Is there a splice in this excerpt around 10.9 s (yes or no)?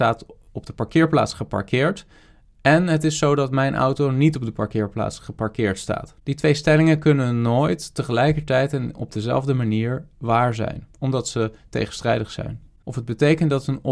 yes